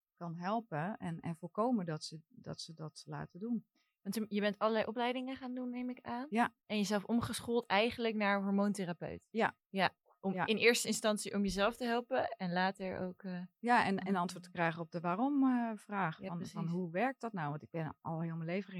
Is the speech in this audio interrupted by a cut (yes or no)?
no